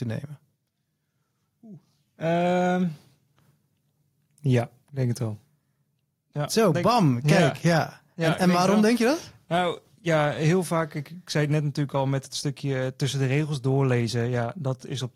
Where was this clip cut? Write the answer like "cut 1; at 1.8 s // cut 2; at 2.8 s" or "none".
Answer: none

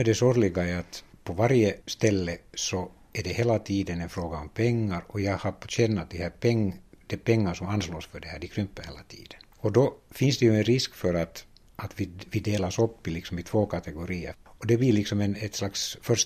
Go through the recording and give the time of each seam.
cut 1; at 14.3 s

